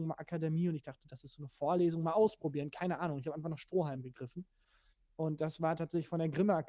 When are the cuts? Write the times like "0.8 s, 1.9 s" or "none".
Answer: none